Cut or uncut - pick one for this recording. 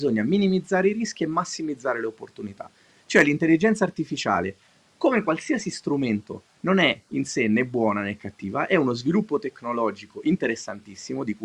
uncut